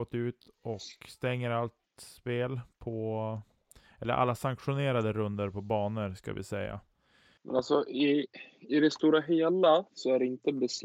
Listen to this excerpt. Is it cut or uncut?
cut